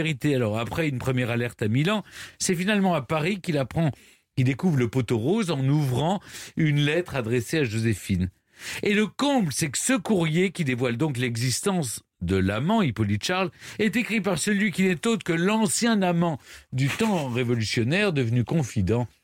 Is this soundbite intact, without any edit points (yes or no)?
yes